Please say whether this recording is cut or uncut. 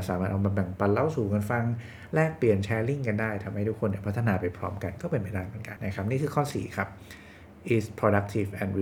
cut